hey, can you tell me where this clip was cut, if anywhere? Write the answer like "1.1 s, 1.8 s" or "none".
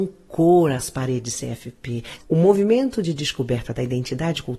2.2 s